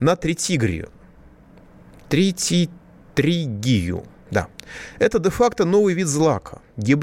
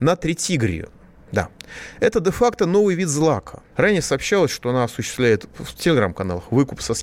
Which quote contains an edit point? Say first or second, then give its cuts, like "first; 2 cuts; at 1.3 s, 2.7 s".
second; 2 cuts; at 1.2 s, 3.7 s